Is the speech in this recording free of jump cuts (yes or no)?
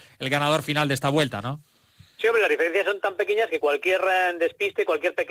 yes